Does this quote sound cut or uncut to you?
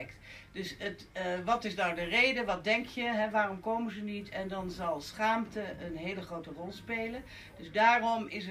uncut